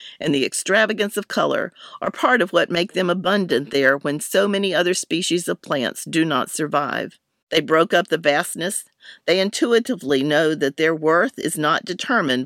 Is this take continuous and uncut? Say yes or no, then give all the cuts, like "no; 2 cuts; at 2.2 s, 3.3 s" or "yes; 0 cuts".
no; 2 cuts; at 7.4 s, 9.2 s